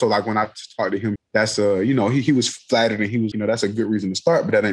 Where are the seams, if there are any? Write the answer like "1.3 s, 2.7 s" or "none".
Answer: 1.2 s, 3.3 s